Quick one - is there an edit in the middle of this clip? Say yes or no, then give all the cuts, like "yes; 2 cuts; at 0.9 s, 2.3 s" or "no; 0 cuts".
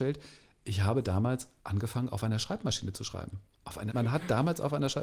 yes; 2 cuts; at 1.6 s, 3.9 s